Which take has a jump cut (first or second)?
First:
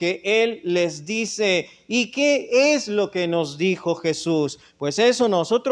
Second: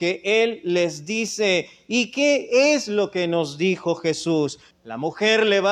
second